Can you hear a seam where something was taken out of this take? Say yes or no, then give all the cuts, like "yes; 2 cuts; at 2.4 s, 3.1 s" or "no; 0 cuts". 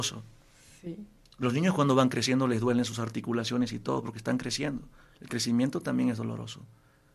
no; 0 cuts